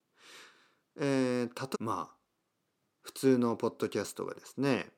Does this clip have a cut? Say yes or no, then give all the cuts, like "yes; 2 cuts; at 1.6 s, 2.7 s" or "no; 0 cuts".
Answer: yes; 1 cut; at 1.7 s